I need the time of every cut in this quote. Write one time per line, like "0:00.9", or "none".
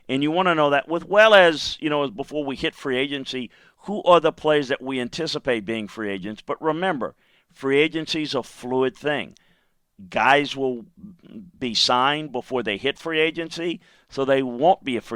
none